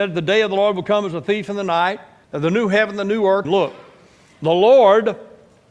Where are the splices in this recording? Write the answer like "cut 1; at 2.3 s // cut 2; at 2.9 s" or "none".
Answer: cut 1; at 2.2 s // cut 2; at 3.4 s